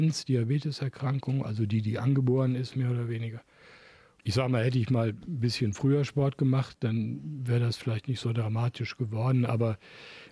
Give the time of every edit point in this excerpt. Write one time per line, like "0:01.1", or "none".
none